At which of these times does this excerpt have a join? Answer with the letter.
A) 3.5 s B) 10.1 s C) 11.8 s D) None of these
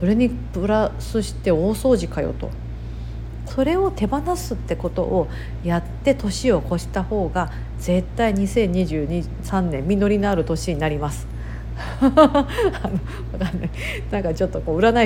A